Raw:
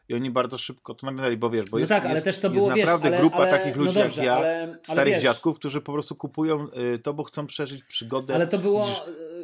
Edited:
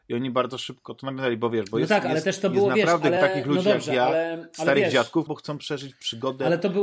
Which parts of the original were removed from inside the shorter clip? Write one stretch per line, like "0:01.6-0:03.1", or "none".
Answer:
0:03.2-0:03.5
0:05.6-0:07.2